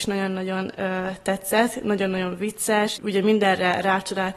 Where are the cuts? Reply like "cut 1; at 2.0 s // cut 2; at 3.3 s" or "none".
cut 1; at 3.0 s